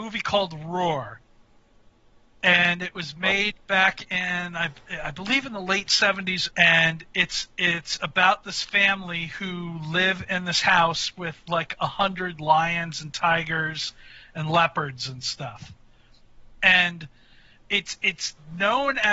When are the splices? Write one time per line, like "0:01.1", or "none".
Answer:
0:06.5